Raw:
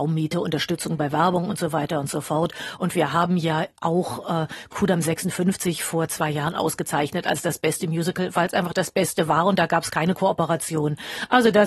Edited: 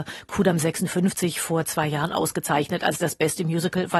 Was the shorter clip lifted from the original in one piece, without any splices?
yes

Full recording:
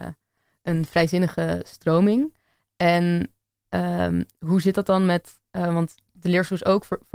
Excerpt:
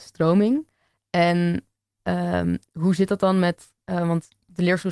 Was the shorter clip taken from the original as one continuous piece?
yes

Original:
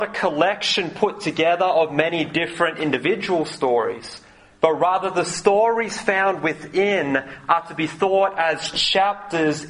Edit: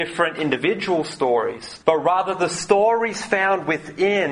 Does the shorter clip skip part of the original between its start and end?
yes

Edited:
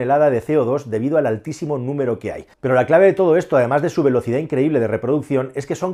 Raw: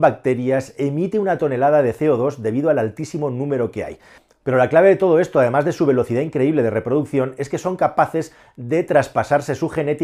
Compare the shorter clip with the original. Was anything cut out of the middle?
yes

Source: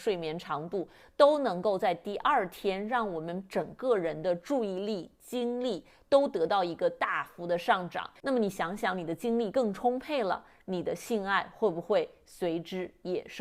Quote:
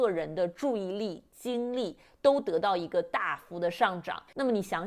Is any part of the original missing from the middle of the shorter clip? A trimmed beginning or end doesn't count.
no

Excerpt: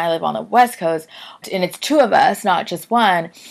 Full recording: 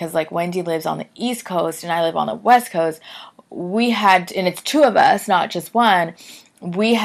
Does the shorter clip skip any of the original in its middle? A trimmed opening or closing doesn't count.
yes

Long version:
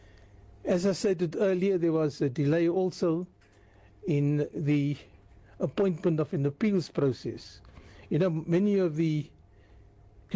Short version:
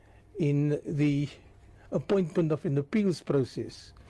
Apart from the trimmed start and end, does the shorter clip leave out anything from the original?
no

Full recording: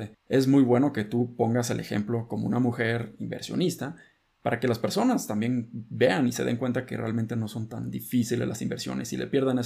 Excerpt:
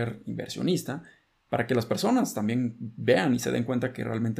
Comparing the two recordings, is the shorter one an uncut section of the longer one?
yes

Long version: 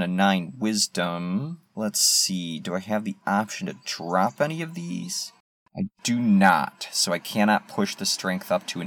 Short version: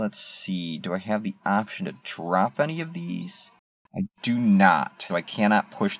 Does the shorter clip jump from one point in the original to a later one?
yes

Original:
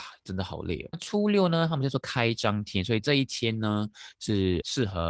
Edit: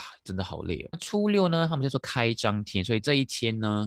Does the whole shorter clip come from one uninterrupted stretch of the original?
yes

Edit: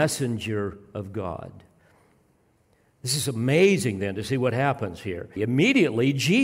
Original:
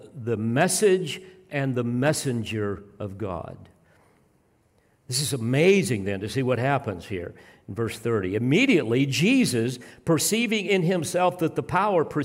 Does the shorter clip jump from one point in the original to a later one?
yes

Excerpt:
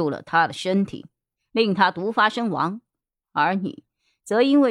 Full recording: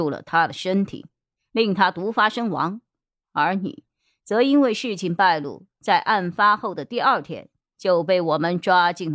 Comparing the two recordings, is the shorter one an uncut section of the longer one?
yes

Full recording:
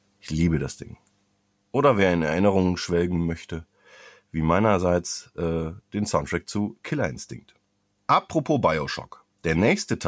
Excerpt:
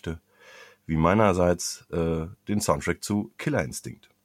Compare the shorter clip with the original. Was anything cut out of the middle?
no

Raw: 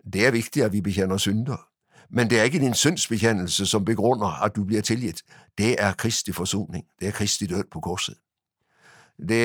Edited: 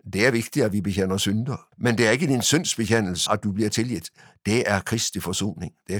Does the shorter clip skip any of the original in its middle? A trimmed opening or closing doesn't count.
yes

